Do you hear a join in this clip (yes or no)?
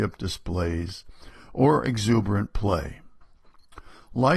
no